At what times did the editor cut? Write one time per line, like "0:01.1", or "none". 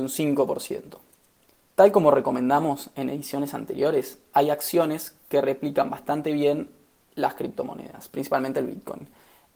0:01.5